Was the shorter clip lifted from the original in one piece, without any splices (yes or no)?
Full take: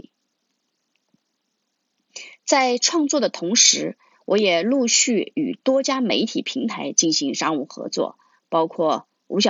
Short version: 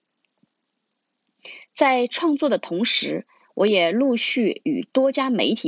yes